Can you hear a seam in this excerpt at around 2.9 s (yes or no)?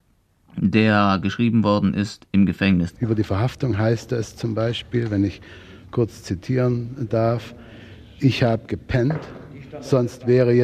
yes